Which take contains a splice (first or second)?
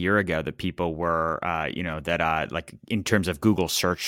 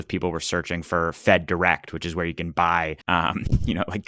second